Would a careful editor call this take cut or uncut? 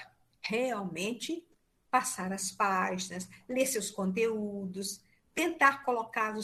uncut